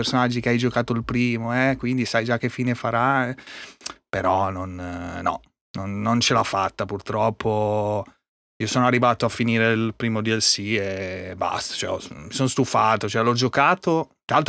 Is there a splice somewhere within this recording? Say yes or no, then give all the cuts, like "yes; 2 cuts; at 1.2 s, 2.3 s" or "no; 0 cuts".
no; 0 cuts